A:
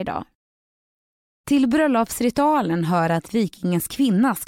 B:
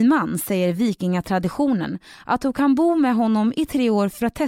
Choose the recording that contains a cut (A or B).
A